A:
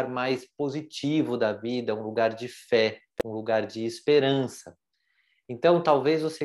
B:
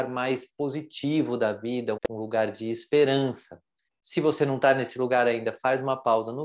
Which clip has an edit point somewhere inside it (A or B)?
B